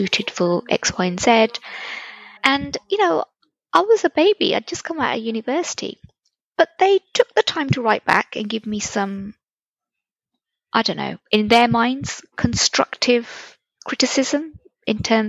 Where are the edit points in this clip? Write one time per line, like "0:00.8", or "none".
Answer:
0:02.4